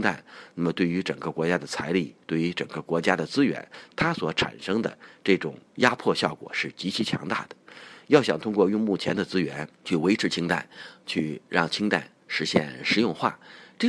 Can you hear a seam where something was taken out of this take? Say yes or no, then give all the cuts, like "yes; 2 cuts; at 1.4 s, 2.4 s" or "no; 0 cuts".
yes; 1 cut; at 5.7 s